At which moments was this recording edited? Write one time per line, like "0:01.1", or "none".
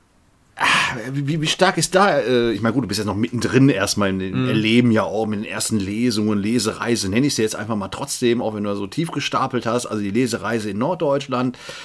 none

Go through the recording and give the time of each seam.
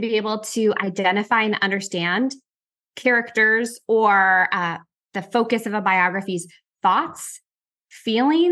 none

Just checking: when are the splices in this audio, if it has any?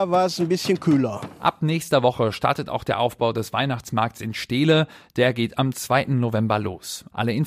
none

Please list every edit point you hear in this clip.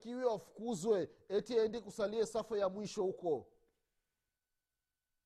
none

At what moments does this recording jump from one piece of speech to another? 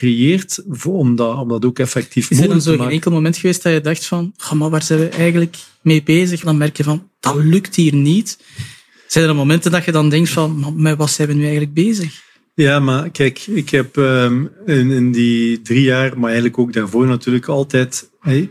0:06.4

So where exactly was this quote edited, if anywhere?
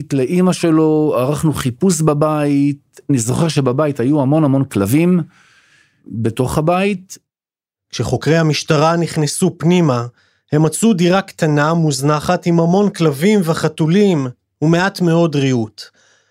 none

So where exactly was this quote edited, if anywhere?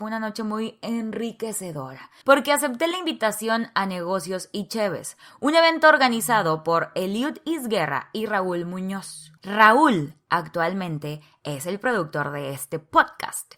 0:02.2
0:09.4

